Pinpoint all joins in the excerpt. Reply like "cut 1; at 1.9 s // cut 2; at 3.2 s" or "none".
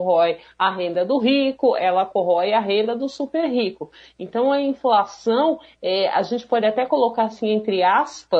none

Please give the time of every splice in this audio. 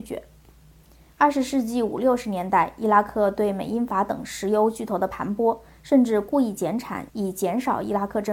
cut 1; at 7.1 s

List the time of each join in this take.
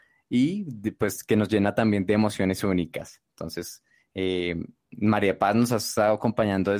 none

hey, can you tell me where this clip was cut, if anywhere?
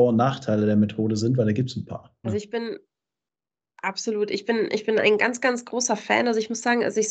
cut 1; at 2.2 s

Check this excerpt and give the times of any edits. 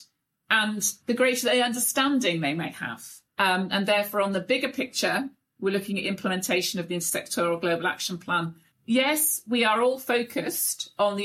cut 1; at 3.3 s // cut 2; at 8.7 s

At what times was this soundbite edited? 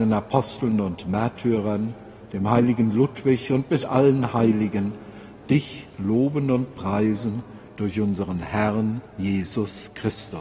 none

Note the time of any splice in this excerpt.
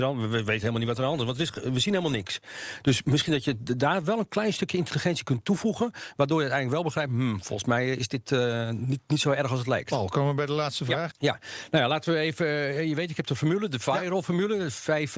cut 1; at 11.1 s

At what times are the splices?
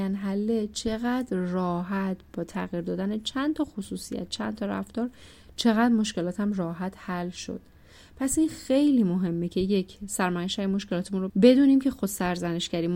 cut 1; at 11.3 s

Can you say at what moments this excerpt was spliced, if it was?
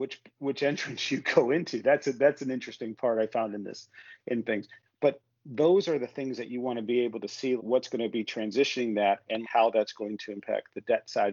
cut 1; at 4.9 s // cut 2; at 7.6 s // cut 3; at 9.4 s

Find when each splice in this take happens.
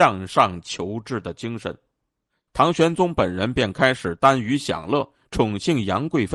cut 1; at 2.5 s

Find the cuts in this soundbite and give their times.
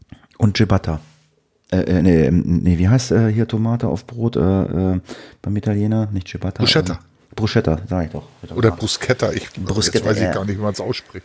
none

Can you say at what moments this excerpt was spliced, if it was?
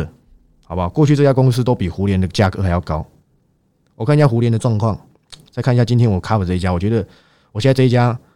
none

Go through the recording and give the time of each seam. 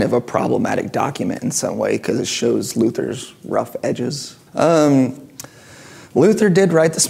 cut 1; at 4.5 s

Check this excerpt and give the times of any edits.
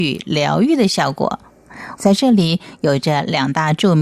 cut 1; at 1.9 s

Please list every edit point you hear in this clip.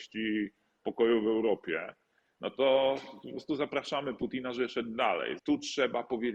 cut 1; at 5.4 s

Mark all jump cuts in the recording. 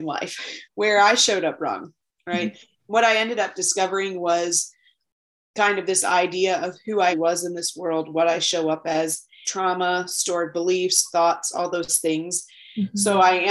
cut 1; at 7.1 s // cut 2; at 9.4 s

